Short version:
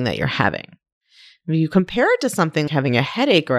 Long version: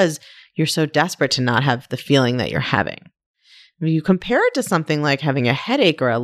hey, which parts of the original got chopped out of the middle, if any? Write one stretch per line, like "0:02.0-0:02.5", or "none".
0:05.0-0:05.2